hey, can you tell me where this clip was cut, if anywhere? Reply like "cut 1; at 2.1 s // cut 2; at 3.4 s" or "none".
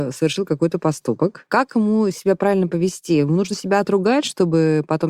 none

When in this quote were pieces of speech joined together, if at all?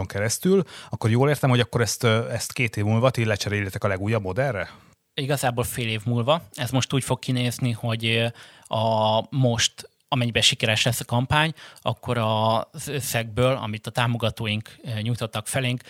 none

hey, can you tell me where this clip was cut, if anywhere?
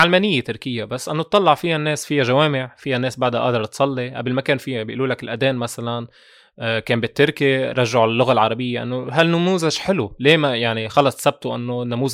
none

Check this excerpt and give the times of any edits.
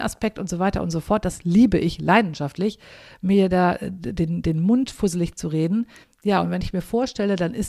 cut 1; at 6.0 s

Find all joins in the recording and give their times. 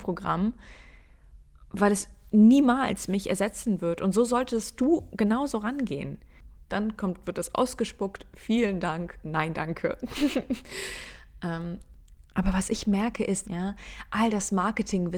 cut 1; at 6.7 s // cut 2; at 13.4 s

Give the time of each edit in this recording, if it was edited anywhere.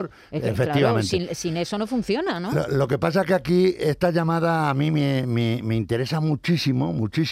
none

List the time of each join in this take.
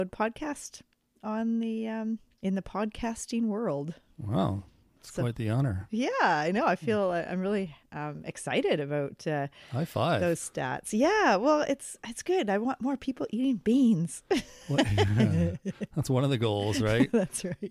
none

